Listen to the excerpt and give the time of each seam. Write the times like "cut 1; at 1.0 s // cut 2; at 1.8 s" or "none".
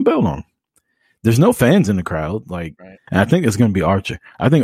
cut 1; at 3.1 s